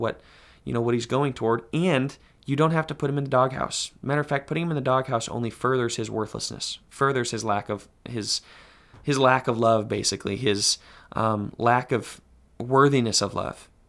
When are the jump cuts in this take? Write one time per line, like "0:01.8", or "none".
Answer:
none